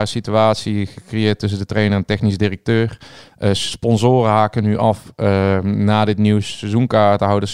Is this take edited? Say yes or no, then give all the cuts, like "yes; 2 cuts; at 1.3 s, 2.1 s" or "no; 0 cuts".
no; 0 cuts